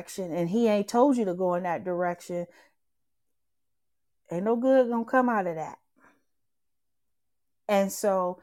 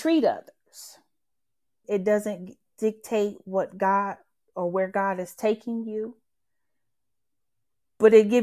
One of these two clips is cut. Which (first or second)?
second